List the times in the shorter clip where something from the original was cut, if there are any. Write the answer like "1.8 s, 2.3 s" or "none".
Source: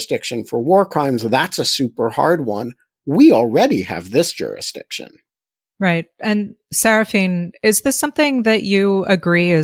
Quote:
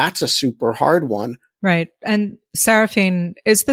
1.6 s

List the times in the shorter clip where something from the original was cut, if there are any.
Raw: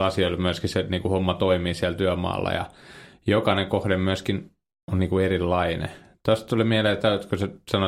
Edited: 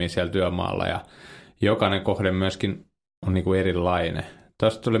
none

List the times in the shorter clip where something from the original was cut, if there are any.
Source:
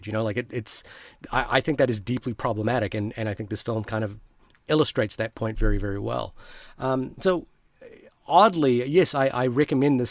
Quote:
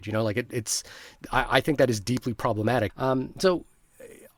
2.9 s

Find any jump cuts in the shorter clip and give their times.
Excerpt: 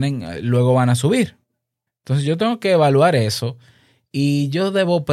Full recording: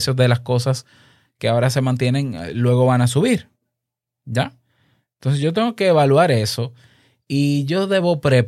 1.9 s

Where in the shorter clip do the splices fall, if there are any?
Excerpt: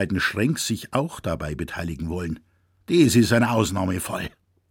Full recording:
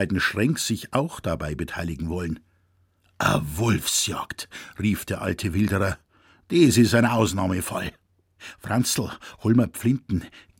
2.8 s

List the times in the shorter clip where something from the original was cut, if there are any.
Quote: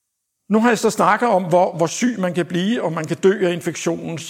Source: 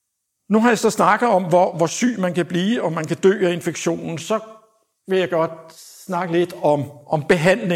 none

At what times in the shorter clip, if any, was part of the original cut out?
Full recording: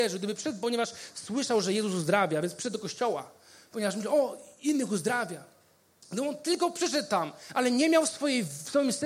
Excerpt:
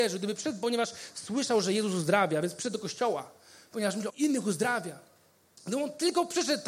4.1 s

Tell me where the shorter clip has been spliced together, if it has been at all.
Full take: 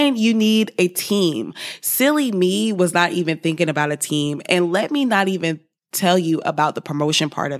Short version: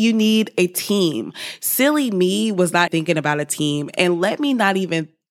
2.9 s

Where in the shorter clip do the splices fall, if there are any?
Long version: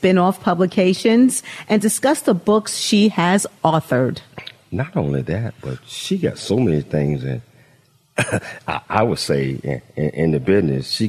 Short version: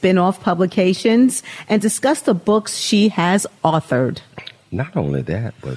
none

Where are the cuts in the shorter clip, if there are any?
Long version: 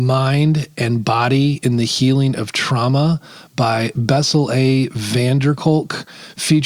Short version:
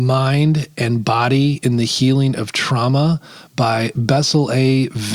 none

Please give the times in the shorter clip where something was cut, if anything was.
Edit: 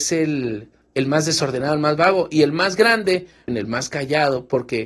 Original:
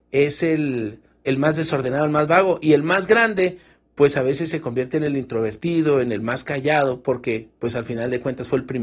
3.5 s

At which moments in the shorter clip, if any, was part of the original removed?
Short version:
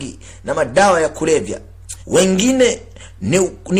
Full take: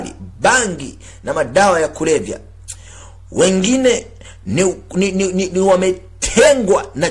2.0 s

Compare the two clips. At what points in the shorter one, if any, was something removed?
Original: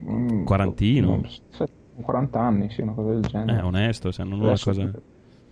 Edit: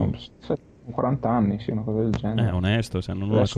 none

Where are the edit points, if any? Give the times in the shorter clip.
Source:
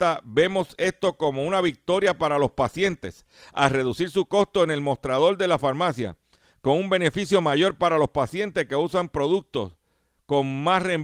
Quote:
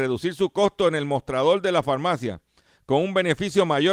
none

